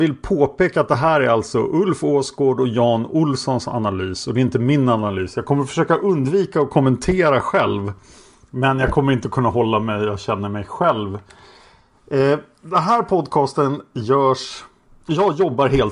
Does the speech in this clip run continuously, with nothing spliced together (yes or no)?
yes